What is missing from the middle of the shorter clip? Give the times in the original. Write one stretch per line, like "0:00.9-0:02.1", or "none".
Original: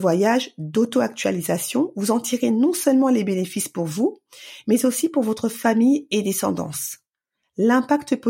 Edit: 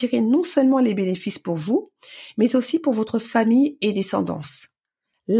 none